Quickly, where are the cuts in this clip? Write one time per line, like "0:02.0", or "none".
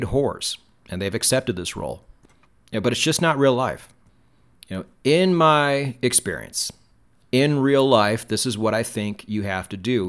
none